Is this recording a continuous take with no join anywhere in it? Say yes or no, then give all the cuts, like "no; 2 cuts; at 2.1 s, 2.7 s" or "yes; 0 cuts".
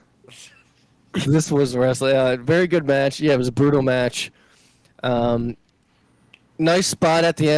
no; 1 cut; at 1.2 s